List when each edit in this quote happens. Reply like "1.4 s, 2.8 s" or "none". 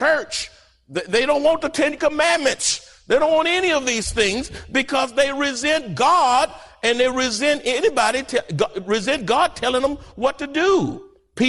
none